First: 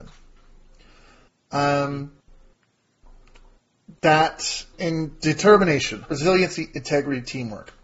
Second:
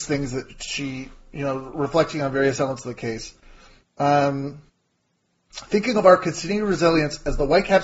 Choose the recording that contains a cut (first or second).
first